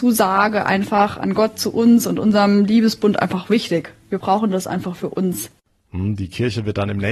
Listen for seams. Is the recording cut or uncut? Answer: uncut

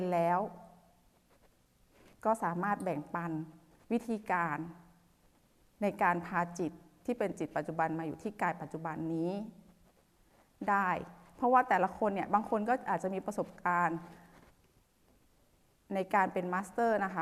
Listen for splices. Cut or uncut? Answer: uncut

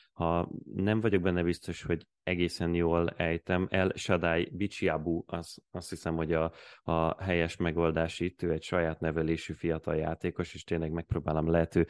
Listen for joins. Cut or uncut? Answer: uncut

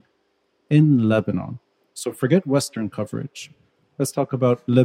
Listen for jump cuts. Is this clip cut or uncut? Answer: uncut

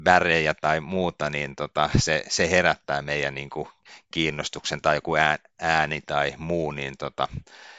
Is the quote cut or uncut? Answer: uncut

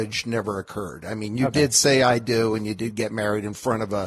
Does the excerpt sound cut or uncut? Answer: uncut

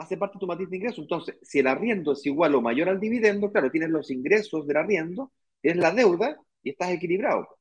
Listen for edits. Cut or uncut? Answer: uncut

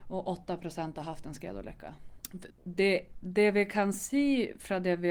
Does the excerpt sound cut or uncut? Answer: cut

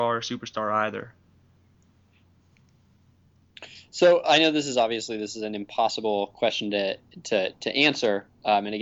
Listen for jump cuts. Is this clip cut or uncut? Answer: cut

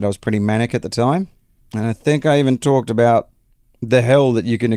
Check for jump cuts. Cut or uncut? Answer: cut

